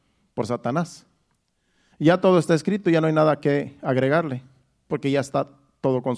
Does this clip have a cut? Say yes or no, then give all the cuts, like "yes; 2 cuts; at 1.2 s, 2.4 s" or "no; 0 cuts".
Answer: yes; 1 cut; at 1.9 s